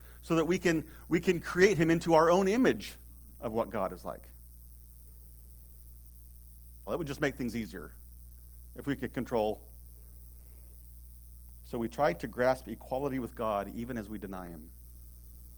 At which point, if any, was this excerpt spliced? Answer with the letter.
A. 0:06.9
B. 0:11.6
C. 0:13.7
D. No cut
A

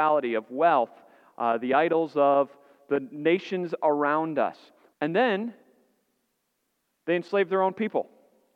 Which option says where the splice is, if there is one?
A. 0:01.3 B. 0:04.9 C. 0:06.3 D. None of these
B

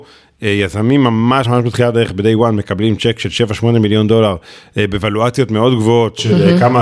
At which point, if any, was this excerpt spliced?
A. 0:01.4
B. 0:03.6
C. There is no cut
A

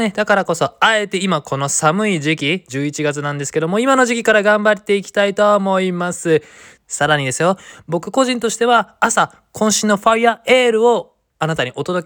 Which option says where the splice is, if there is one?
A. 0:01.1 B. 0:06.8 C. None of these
B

